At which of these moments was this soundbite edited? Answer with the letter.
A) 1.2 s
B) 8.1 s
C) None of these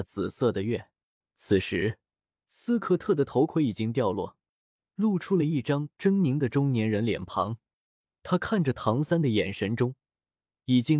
A